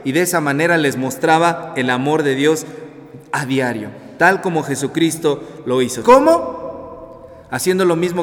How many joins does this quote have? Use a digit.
1